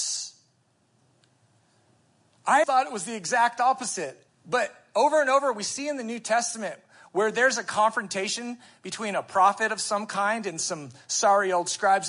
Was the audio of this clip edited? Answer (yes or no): yes